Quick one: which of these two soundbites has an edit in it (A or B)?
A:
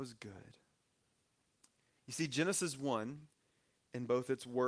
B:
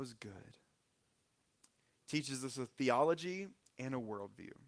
B